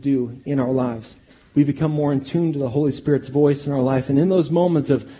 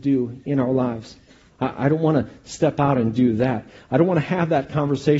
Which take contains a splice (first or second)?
second